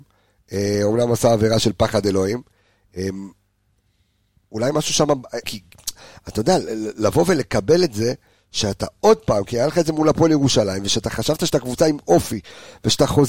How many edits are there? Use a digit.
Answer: 1